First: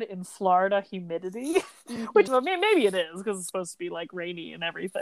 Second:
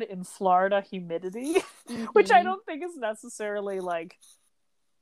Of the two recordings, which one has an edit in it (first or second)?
first